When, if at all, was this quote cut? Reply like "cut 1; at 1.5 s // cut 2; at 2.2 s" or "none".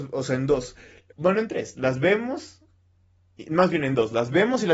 cut 1; at 1.1 s